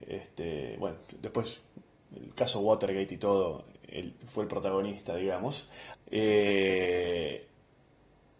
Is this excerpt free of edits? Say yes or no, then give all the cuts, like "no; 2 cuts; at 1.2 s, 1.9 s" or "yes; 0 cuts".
no; 1 cut; at 5.9 s